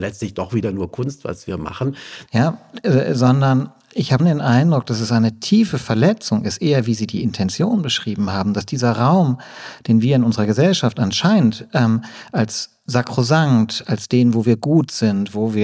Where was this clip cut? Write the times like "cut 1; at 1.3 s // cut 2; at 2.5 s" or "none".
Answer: cut 1; at 2.3 s // cut 2; at 4.2 s